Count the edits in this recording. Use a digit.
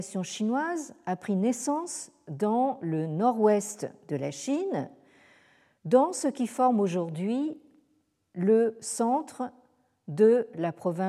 0